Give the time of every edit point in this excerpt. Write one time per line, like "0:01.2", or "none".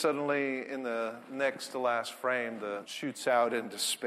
0:02.8